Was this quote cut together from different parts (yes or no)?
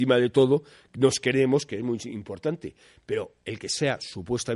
no